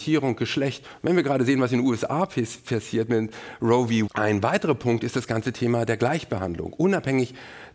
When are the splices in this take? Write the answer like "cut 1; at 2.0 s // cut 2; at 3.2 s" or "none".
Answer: cut 1; at 4.1 s